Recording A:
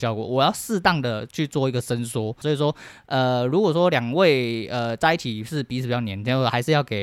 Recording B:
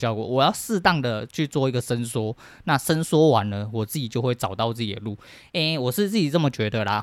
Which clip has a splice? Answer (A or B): A